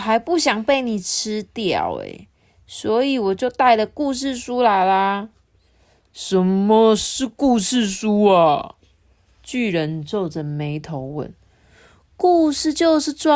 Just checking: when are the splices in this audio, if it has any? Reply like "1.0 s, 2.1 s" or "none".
none